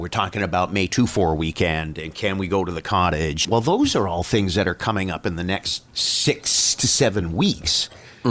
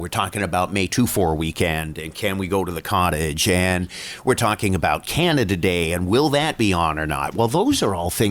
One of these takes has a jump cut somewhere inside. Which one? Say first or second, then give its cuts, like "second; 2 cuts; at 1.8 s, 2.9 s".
first; 2 cuts; at 3.4 s, 5.9 s